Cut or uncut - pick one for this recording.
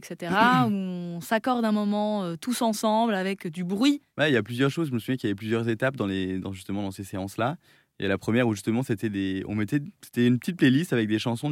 uncut